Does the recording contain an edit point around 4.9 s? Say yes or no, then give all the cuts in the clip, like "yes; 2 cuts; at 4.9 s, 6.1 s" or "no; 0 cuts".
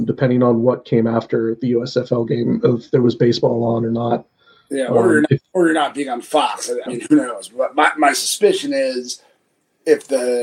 no; 1 cut; at 6.9 s